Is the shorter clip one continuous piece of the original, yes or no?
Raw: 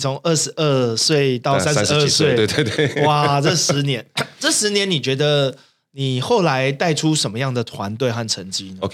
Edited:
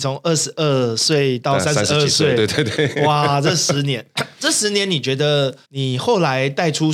no